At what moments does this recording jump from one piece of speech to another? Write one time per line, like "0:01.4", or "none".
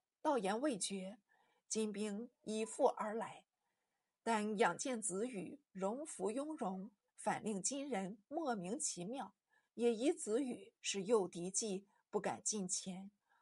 0:07.1
0:09.7